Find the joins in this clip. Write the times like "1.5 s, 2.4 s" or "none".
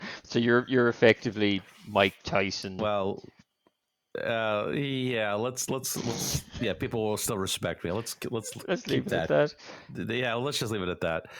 2.8 s

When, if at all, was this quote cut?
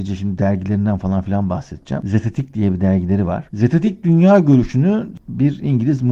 none

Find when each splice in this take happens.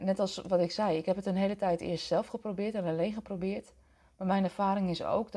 none

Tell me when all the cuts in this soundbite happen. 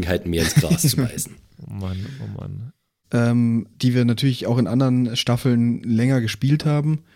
3.0 s

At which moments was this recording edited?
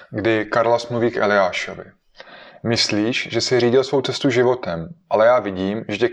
none

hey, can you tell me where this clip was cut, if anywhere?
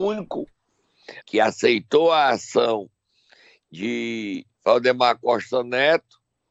1.2 s, 4.5 s

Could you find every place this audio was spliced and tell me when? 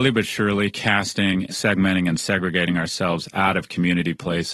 none

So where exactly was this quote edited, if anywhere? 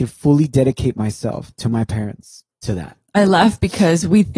2.6 s

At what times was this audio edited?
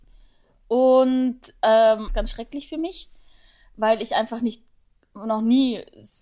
2.1 s

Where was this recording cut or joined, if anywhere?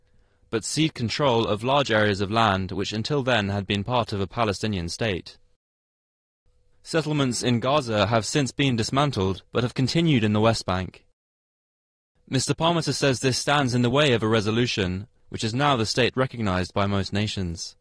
6.7 s, 9.5 s, 15.2 s

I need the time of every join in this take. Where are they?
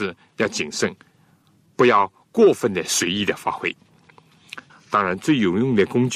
4.7 s

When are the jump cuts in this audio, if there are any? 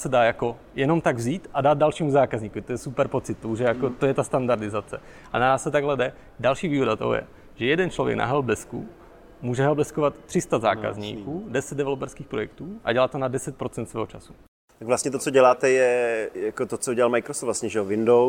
none

